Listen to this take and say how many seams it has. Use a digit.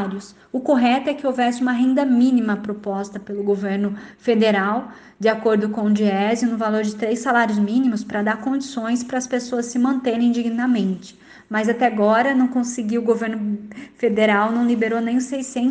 0